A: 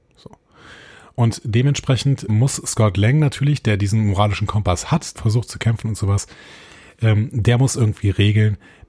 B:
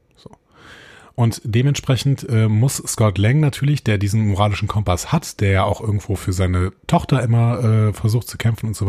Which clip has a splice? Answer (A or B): A